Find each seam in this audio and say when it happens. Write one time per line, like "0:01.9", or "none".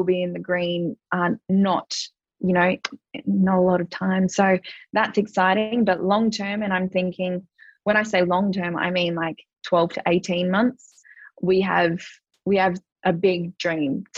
none